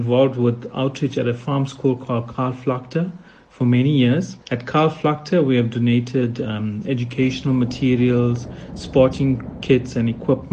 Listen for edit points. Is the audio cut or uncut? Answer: cut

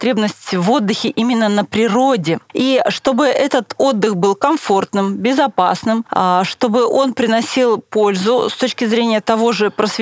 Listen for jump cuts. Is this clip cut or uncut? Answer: uncut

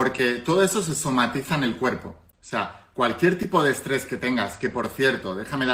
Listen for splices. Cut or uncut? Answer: uncut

